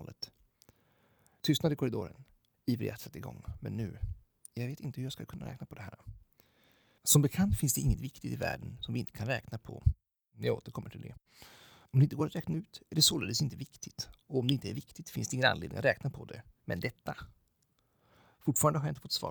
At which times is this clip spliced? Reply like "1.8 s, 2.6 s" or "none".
2.5 s, 16.6 s